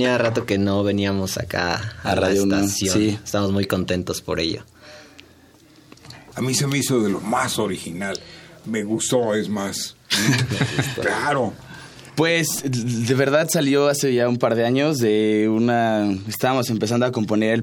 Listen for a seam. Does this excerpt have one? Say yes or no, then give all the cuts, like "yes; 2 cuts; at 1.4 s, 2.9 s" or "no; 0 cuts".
yes; 1 cut; at 6.3 s